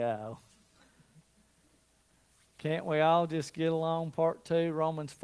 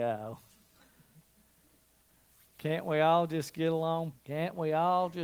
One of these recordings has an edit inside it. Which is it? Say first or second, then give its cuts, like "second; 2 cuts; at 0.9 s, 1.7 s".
second; 1 cut; at 4.1 s